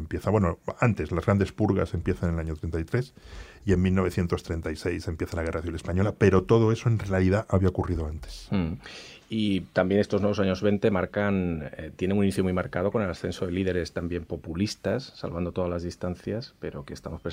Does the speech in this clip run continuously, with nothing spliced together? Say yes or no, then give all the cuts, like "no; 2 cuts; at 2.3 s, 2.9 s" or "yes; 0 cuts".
yes; 0 cuts